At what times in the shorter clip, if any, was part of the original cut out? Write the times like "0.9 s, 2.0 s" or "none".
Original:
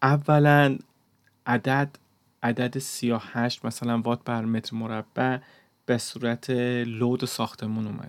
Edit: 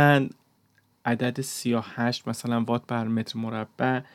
0.9 s